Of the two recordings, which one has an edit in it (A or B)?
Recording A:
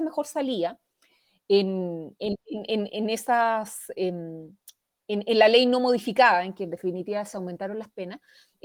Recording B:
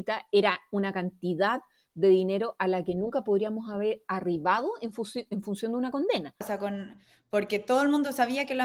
B